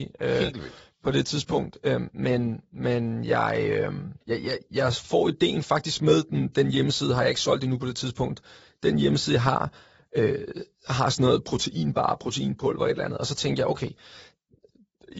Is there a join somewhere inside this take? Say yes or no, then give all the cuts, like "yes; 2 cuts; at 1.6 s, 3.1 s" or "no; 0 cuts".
yes; 1 cut; at 4.2 s